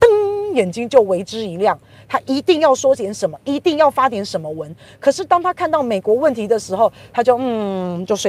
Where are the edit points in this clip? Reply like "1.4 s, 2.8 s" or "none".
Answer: none